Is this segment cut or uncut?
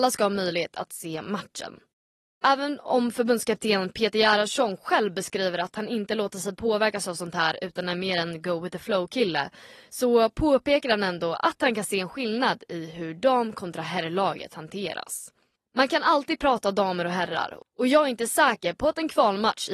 uncut